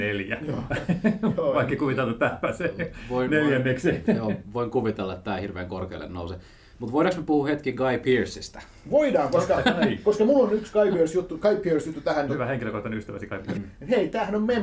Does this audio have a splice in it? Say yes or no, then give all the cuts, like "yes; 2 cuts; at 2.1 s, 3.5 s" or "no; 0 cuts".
yes; 2 cuts; at 12.3 s, 13.6 s